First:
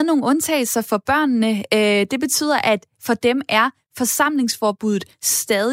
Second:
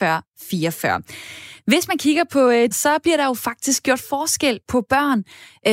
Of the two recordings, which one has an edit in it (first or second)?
second